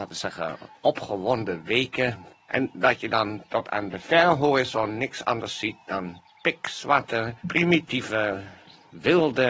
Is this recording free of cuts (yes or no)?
no